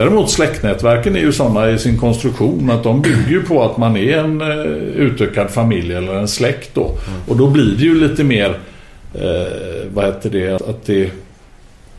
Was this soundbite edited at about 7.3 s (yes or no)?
no